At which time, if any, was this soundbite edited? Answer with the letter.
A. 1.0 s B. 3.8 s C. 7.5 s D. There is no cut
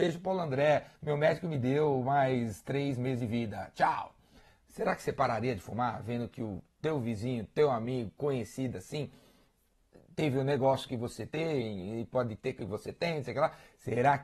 D